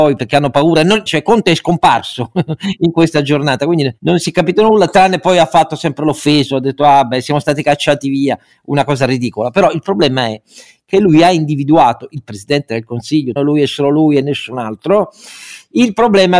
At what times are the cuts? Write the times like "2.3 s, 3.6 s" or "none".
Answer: 1.1 s, 13.4 s